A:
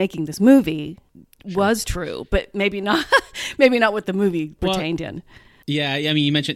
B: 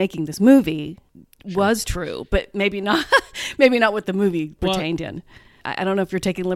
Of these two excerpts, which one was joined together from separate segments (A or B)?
B